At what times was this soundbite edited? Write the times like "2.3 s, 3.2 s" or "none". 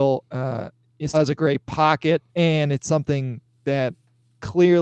1.1 s, 2.3 s